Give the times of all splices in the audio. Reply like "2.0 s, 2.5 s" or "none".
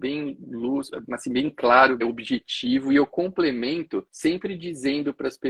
2.0 s, 4.1 s